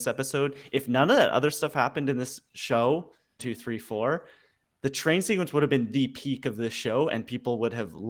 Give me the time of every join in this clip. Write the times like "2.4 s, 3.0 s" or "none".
3.4 s